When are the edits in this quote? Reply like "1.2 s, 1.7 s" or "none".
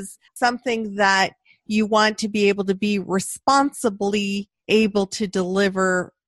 none